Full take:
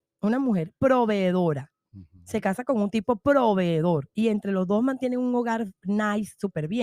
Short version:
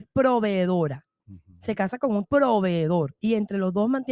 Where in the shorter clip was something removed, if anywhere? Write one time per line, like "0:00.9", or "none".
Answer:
0:02.2

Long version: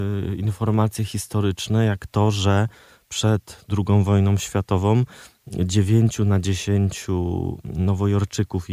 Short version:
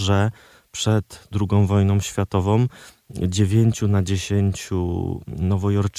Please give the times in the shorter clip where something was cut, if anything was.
none

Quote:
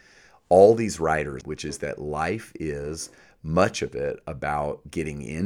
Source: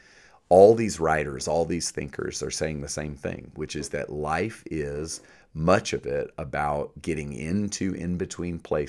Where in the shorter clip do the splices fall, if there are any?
0:01.4

